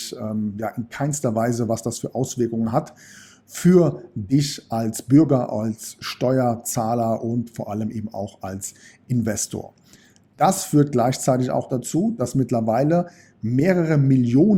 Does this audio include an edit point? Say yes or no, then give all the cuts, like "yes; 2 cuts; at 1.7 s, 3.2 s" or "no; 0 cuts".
no; 0 cuts